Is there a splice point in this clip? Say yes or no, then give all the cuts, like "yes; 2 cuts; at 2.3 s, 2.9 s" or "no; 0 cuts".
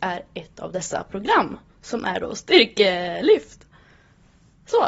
no; 0 cuts